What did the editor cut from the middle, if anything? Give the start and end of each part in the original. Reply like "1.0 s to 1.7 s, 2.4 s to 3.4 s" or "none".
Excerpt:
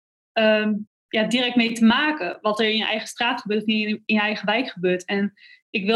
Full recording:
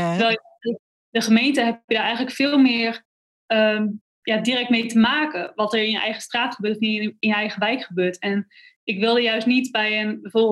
none

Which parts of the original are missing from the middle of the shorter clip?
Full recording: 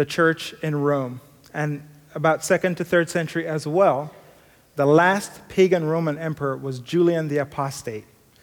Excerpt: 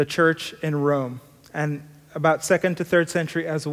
none

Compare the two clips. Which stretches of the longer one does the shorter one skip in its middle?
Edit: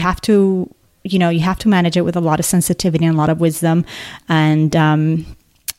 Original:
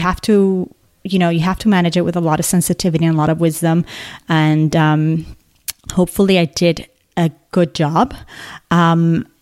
none

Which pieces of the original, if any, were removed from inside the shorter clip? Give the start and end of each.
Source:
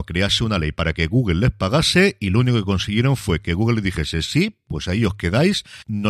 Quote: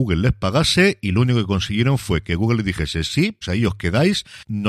4.6 s to 4.8 s

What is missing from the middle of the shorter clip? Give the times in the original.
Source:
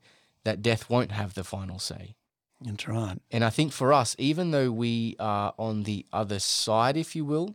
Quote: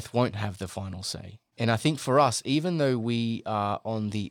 2.3 s to 3.2 s

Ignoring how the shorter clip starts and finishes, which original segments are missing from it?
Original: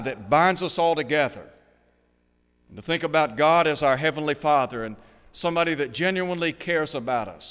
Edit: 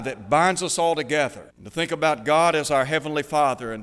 1.5 s to 2.6 s

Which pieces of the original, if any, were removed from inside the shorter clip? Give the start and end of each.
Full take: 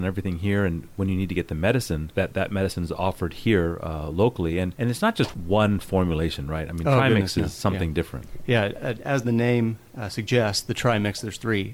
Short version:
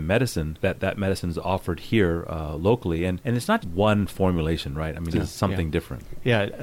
5.1 s to 5.3 s, 6.8 s to 7.3 s

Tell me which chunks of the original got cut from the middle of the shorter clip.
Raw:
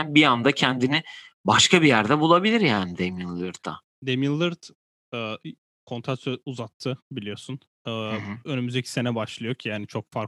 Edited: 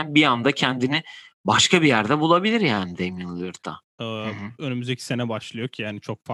3.9 s to 7.8 s

